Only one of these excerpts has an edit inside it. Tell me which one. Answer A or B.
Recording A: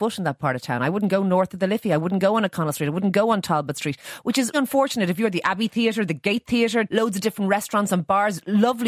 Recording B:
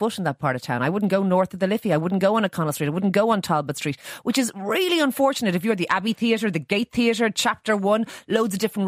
A